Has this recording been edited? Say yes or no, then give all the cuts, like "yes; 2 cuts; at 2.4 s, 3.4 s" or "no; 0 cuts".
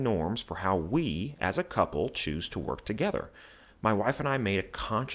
no; 0 cuts